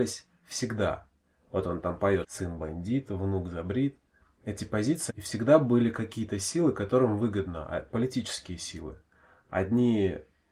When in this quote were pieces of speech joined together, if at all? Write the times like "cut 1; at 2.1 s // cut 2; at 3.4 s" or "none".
cut 1; at 2.2 s // cut 2; at 5.1 s